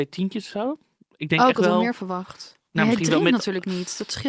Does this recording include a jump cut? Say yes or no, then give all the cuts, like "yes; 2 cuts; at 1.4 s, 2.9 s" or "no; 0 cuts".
yes; 1 cut; at 2.7 s